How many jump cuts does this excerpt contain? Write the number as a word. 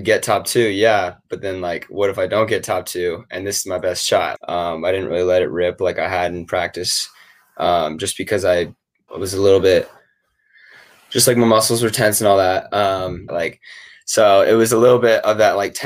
three